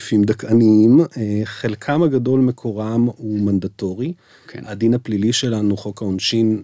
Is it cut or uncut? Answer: uncut